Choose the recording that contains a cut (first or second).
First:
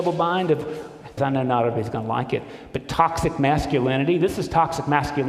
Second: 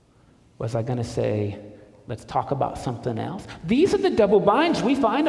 first